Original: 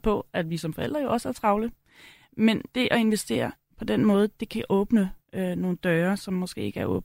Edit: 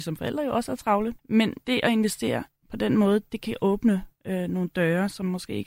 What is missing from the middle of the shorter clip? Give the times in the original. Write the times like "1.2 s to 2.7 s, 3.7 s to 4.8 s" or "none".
1.8 s to 2.3 s